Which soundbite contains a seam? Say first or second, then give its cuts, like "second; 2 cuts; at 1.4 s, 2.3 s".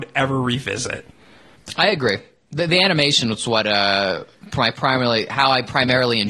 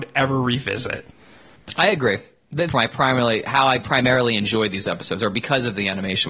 second; 1 cut; at 2.7 s